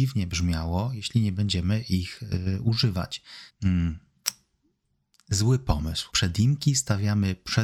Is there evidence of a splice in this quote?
yes; 2 cuts; at 3.5 s, 6.1 s

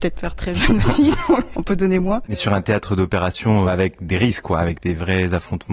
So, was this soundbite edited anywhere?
yes; 2 cuts; at 1.5 s, 3.7 s

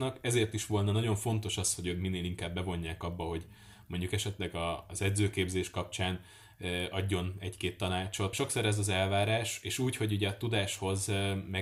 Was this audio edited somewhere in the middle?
yes; 1 cut; at 8.3 s

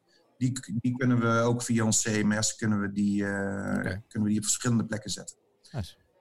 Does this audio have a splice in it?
no; 0 cuts

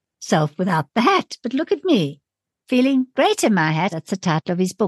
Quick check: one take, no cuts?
no; 1 cut; at 3.9 s

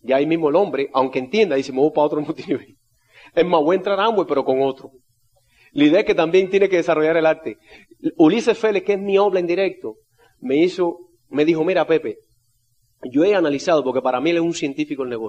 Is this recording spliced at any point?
no; 0 cuts

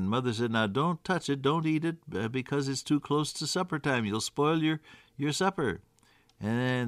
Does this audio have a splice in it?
no; 0 cuts

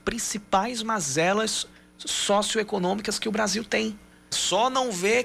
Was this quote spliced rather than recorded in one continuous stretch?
yes; 1 cut; at 4.3 s

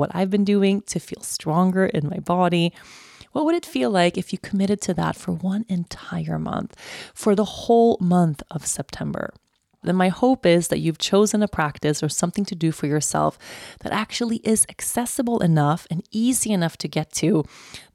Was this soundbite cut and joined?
yes; 1 cut; at 9.8 s

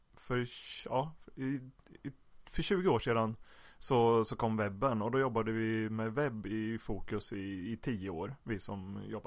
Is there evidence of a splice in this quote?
no; 0 cuts

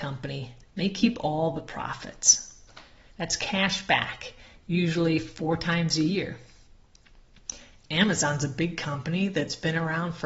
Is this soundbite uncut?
no; 1 cut; at 3.1 s

